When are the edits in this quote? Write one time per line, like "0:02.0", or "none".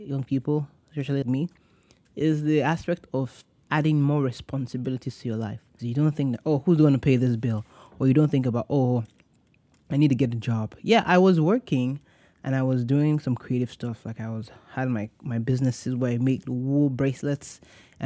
0:01.2
0:05.8